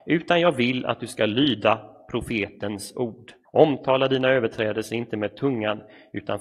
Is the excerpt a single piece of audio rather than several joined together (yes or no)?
no